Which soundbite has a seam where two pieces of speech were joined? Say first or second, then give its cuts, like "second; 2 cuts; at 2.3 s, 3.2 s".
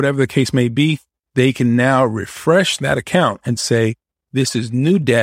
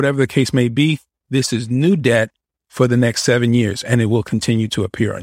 second; 1 cut; at 1.2 s